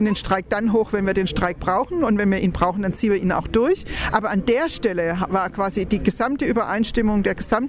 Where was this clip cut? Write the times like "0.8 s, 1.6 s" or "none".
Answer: none